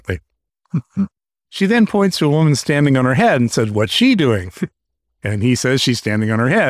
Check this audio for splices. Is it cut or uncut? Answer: uncut